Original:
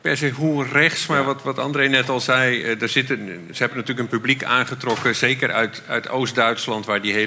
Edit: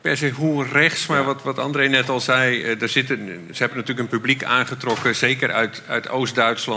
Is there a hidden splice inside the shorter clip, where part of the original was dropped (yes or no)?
no